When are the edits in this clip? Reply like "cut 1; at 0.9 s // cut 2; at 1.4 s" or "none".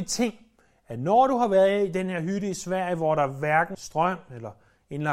cut 1; at 3.7 s